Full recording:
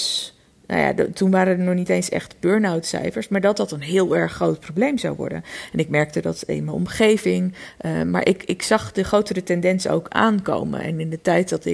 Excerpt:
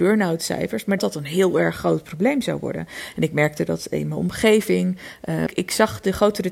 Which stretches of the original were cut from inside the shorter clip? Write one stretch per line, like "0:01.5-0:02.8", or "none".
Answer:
0:03.4-0:03.5
0:08.0-0:08.4